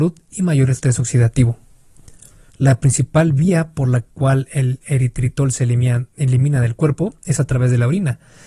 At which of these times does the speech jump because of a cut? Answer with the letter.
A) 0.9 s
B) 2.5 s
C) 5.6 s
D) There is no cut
B